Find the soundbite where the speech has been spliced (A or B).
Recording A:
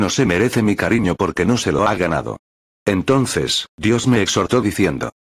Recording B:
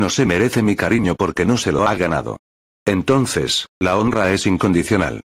B